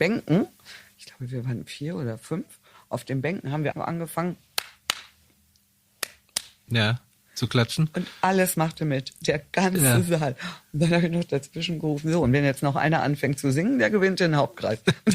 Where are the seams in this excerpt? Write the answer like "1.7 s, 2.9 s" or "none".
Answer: 3.7 s

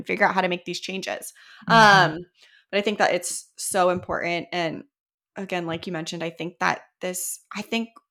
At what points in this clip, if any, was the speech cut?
none

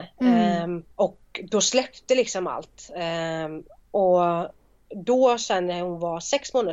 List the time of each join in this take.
0.9 s

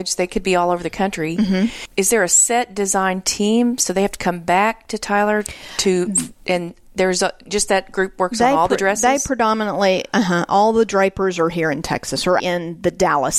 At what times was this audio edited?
12.4 s

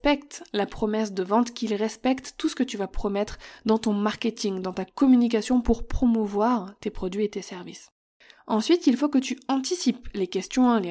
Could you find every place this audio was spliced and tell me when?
none

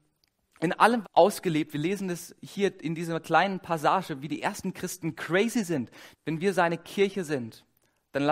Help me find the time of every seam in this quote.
1.0 s, 6.1 s

